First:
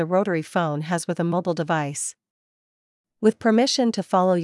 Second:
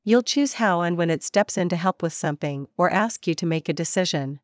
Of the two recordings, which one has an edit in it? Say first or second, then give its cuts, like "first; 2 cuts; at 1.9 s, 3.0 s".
first; 1 cut; at 3.1 s